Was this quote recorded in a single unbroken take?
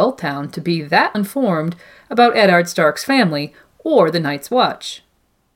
no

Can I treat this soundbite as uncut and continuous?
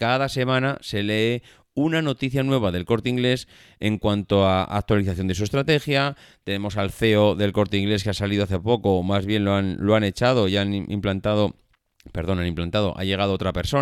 yes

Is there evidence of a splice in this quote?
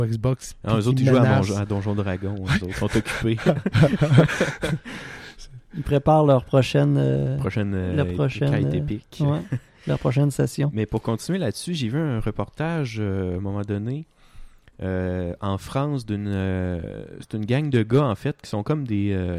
no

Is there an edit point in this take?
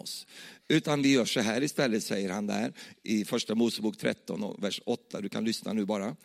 no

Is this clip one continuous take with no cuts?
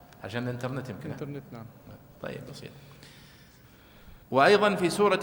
no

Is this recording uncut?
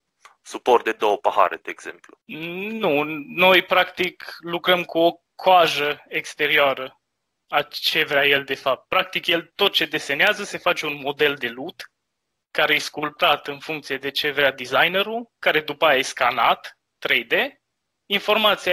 no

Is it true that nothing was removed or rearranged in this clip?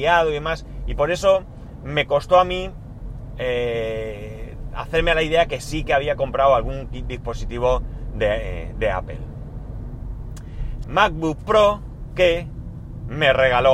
no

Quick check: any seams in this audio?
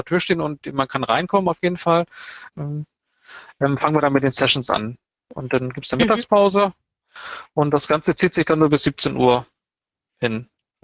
yes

